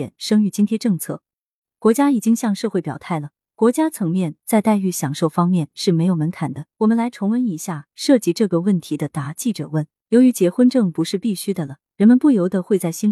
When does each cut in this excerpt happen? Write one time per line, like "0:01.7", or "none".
0:06.7
0:10.1